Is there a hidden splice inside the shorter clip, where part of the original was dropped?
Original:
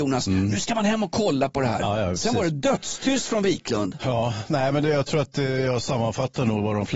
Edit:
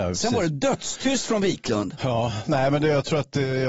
no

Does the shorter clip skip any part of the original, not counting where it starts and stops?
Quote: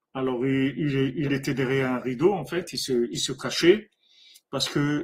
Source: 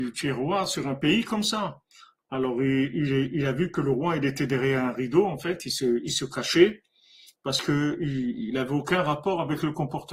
yes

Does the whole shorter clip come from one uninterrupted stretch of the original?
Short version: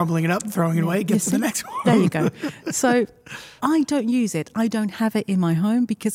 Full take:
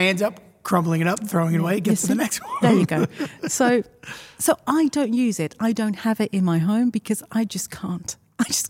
no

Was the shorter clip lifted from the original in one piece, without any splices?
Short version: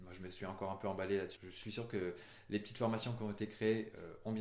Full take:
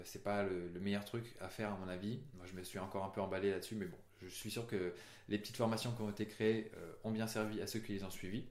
no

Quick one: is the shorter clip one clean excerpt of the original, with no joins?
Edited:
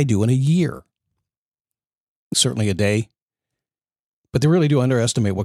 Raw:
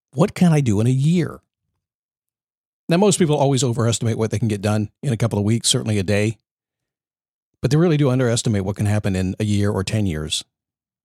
no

